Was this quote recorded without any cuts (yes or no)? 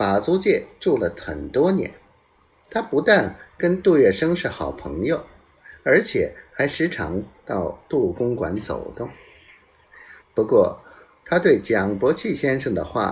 no